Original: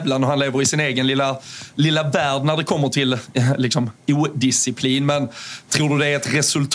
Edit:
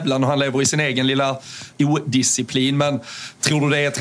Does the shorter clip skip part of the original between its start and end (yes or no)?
yes